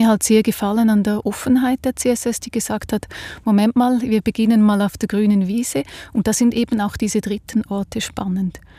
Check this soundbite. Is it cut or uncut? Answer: uncut